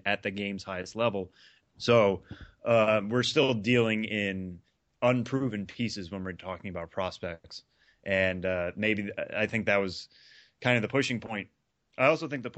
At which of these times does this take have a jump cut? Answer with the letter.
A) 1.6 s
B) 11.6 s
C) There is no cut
A